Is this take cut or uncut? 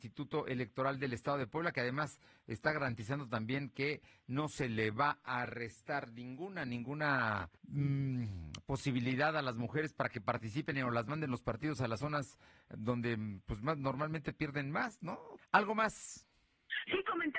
cut